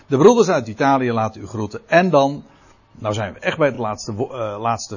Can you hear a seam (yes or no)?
no